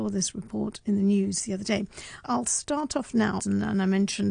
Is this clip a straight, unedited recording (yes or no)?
no